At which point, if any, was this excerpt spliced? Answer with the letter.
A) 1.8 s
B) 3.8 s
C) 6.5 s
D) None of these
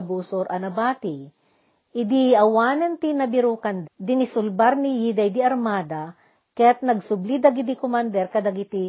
B